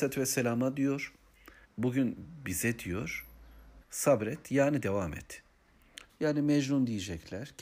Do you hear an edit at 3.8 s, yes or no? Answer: yes